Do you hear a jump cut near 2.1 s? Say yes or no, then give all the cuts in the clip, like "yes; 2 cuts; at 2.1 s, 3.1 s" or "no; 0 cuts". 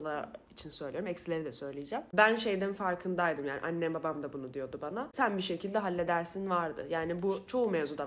no; 0 cuts